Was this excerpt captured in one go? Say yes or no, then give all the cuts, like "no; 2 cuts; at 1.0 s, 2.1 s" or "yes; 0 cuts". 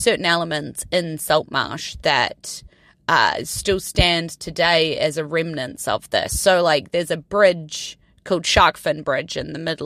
yes; 0 cuts